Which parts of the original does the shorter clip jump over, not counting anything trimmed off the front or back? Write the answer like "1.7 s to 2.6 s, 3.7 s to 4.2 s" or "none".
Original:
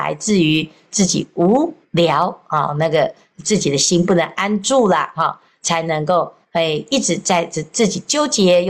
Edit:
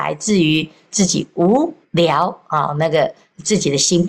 none